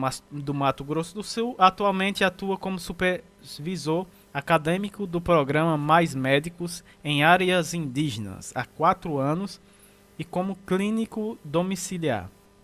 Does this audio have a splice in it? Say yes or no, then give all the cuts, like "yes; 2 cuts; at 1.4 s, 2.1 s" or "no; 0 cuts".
no; 0 cuts